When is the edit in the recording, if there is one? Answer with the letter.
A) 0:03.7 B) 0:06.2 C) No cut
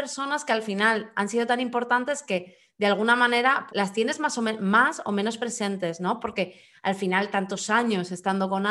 A